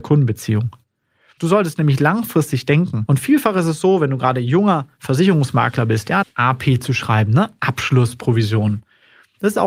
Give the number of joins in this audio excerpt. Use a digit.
3